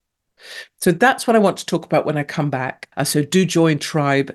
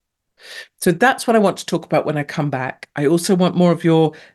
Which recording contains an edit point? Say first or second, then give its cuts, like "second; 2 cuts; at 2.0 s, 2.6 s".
first; 1 cut; at 2.9 s